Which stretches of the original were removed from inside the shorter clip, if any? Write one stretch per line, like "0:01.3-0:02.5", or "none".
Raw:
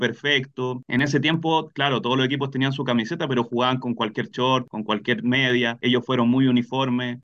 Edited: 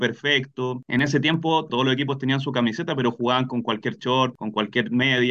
0:01.7-0:02.0

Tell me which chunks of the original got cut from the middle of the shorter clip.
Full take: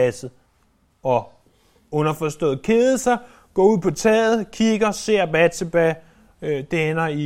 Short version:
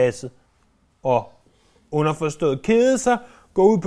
none

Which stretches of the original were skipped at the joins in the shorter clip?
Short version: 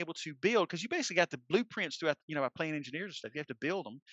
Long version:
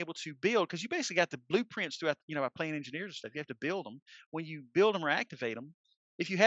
none

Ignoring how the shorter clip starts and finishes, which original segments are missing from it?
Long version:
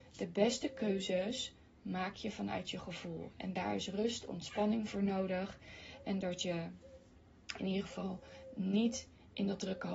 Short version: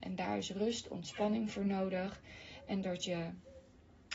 none

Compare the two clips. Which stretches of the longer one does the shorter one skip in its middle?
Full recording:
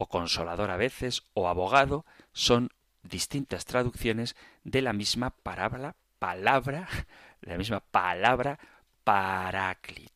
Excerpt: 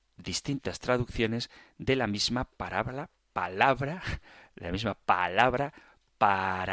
none

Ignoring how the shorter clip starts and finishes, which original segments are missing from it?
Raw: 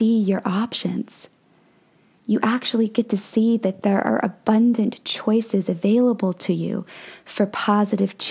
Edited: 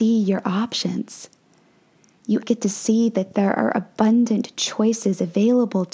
0:02.4-0:02.9

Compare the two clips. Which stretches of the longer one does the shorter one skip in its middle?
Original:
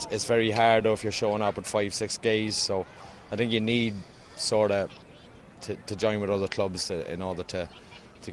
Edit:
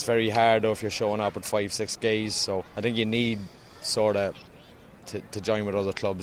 0:02.9-0:03.2

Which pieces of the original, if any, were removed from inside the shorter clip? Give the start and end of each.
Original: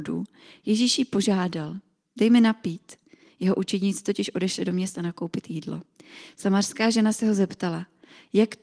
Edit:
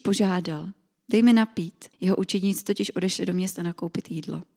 0:03.0-0:03.3

